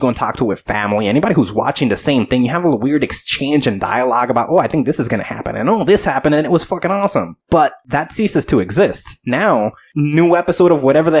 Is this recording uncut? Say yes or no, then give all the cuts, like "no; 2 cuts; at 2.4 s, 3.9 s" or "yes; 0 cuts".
yes; 0 cuts